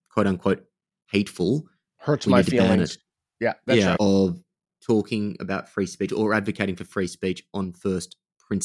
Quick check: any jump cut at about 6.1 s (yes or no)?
yes